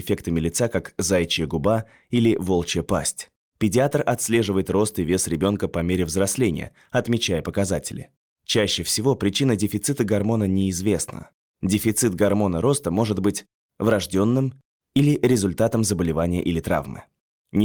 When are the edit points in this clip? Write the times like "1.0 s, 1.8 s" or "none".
3.4 s, 8.3 s